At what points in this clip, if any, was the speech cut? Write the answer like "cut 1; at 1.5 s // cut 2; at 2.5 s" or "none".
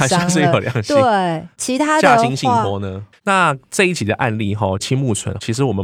cut 1; at 3.1 s